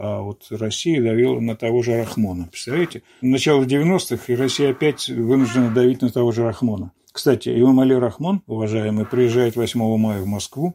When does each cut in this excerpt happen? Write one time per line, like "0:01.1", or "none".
none